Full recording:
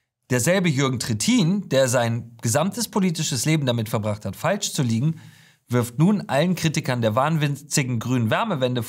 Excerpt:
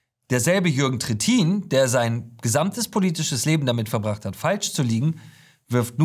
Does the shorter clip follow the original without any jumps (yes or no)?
yes